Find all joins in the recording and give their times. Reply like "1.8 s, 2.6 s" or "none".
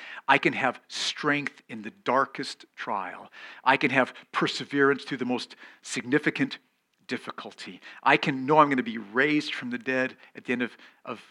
none